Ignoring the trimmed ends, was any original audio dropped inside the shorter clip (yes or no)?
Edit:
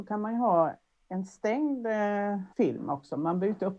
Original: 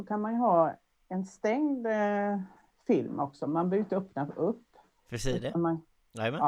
yes